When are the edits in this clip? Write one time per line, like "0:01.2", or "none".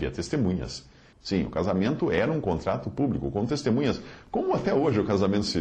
0:01.1